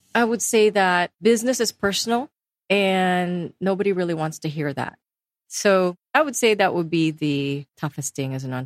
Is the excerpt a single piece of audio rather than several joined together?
no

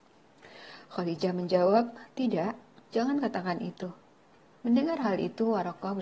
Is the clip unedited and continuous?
no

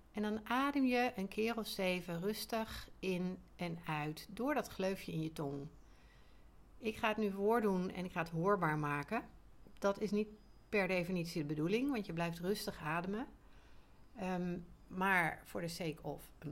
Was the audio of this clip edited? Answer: no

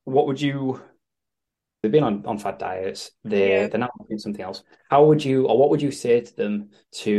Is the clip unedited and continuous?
no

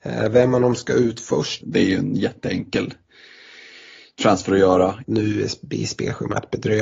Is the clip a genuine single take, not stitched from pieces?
no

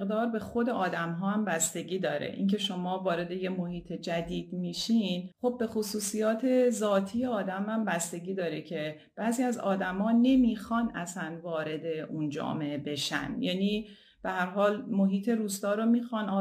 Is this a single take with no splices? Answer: no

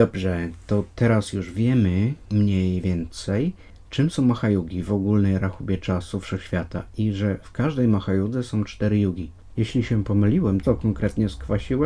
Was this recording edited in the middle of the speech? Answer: yes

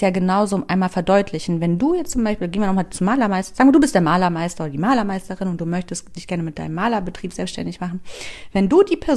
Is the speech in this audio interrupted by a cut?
no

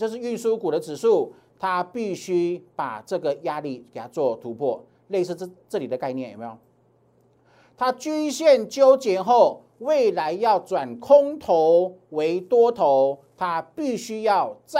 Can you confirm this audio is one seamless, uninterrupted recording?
yes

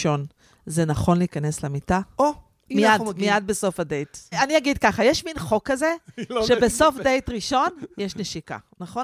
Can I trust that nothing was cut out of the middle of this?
no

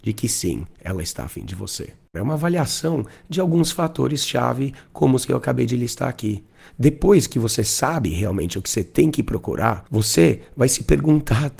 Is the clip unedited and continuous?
no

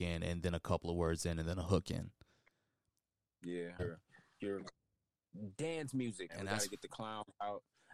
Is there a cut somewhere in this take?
yes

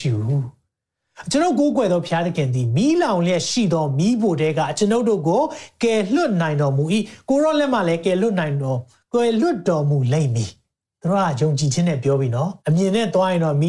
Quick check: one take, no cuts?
no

